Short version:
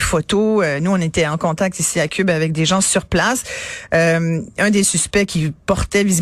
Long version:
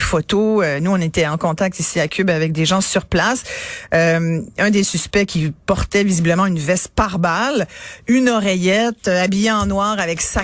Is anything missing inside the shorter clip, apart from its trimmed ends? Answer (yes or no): no